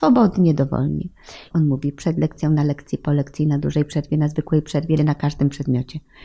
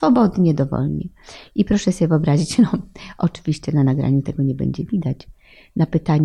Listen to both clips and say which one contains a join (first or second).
first